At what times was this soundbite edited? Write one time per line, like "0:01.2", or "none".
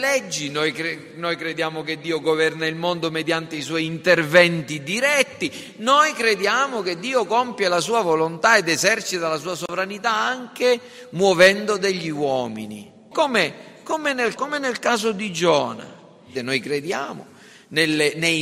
0:13.1
0:14.4
0:16.4